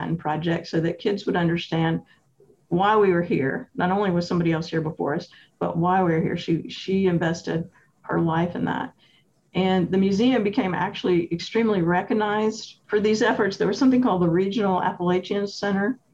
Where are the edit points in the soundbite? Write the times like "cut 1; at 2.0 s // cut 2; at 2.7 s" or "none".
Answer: cut 1; at 12.8 s